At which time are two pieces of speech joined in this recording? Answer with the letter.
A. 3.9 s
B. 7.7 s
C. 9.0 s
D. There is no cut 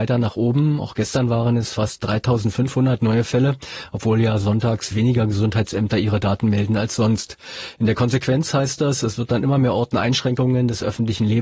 D